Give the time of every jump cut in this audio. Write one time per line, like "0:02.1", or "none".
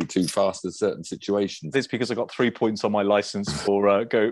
0:01.7